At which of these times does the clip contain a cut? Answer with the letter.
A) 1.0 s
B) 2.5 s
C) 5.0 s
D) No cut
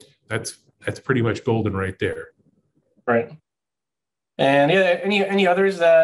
D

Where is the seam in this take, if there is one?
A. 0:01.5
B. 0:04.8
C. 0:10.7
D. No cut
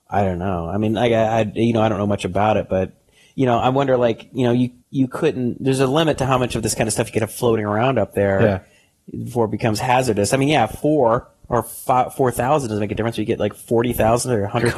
B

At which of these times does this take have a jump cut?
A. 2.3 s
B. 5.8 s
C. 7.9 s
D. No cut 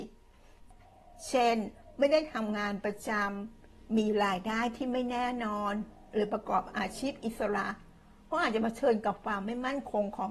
D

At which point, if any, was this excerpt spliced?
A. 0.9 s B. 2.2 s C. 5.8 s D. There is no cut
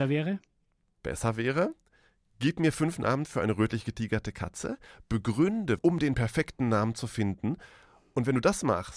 C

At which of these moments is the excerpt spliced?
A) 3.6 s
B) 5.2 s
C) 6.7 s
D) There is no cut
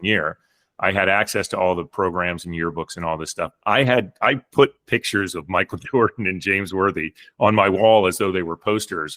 D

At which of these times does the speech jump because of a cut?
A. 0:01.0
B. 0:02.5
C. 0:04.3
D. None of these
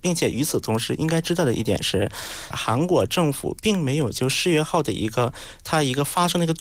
B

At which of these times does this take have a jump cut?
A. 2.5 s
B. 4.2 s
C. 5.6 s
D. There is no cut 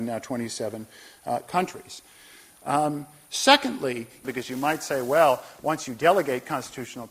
B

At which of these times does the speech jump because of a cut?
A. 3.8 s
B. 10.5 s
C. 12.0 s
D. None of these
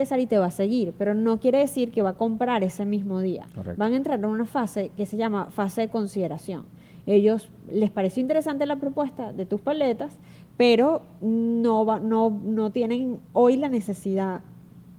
D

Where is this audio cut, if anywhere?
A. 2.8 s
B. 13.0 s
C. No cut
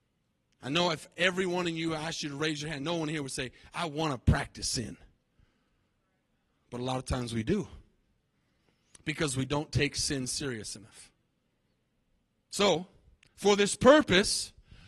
C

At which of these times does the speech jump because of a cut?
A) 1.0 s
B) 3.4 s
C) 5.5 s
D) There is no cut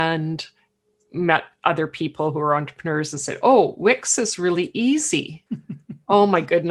C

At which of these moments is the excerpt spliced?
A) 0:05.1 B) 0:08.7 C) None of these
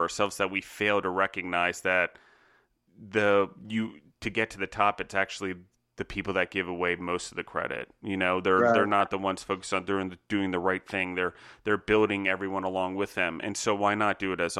C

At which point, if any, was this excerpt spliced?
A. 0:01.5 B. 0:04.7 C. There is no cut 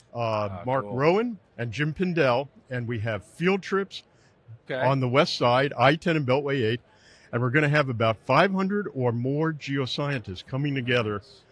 B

